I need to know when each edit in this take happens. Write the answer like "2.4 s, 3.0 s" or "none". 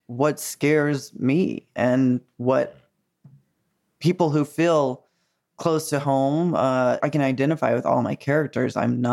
7.0 s